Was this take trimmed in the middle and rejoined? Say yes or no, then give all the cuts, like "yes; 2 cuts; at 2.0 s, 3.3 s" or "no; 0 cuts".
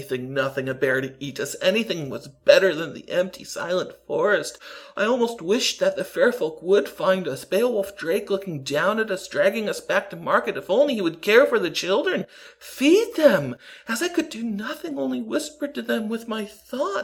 no; 0 cuts